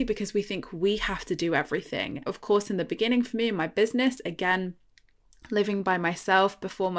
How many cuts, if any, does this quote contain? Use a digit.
1